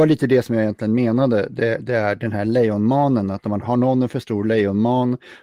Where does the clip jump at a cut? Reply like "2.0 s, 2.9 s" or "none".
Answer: 3.6 s